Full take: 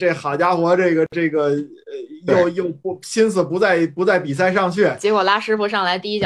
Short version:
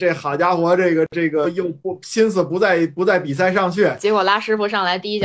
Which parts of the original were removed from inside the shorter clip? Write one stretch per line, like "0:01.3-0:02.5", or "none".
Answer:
0:01.4-0:02.4